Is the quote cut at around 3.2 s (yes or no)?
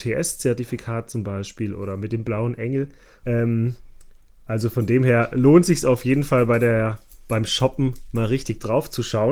yes